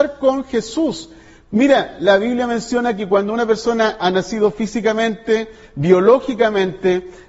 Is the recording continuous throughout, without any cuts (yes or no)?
yes